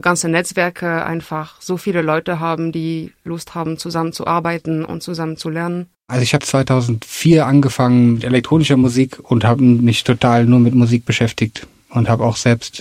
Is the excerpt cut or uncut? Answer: cut